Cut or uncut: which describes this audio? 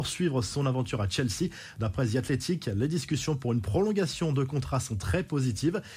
uncut